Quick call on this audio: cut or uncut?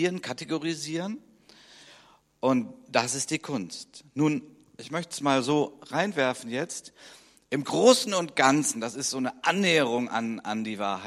uncut